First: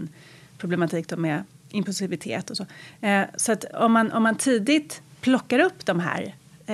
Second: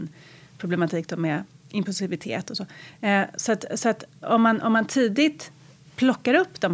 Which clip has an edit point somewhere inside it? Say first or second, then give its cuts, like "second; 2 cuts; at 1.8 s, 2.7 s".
first; 2 cuts; at 3.7 s, 5.1 s